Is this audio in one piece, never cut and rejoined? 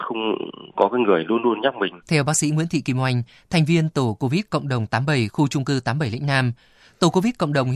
no; 1 cut; at 2.0 s

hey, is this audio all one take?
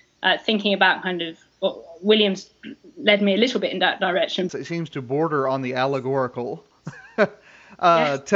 no; 1 cut; at 4.5 s

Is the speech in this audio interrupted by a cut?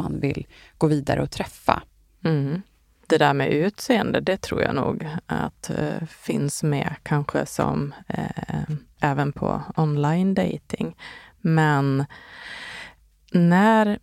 yes; 1 cut; at 9.0 s

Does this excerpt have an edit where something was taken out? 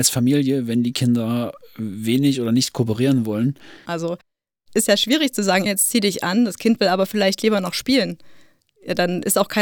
yes; 2 cuts; at 3.9 s, 5.7 s

